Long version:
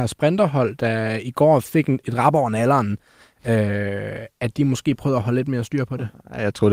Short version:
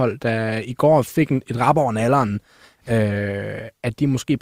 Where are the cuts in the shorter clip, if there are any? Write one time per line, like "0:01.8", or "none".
none